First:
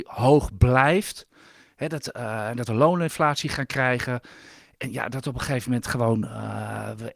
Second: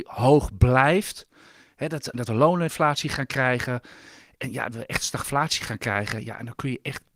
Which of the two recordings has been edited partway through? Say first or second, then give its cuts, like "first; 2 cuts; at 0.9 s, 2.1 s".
second; 2 cuts; at 2.1 s, 4.7 s